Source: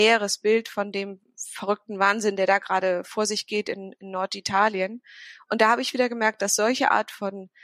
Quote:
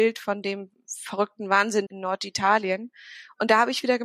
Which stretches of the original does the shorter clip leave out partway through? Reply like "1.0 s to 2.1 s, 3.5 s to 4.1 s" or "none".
2.4 s to 4.0 s